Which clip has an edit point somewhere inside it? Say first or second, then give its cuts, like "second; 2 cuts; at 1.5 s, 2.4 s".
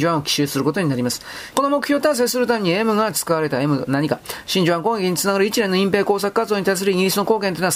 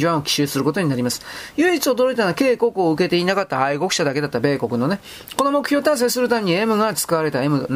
first; 1 cut; at 1.5 s